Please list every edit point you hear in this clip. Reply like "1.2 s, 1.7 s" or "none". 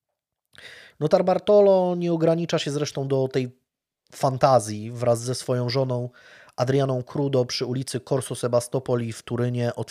0.9 s

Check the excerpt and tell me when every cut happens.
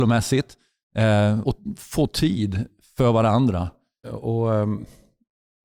1.4 s, 4.0 s

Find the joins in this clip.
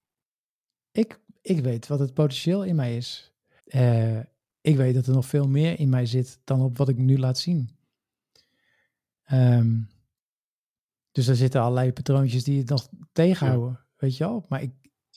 3.6 s

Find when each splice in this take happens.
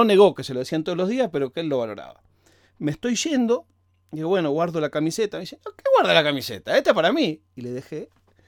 none

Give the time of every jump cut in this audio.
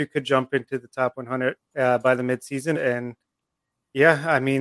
1.7 s, 2.7 s

